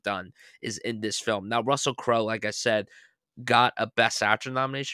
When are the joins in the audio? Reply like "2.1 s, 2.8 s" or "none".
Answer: none